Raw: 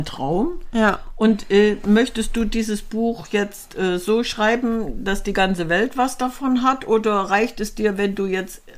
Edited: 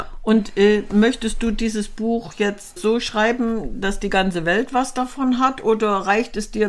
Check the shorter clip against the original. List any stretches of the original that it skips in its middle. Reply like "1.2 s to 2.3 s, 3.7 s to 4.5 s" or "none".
3.7 s to 4.0 s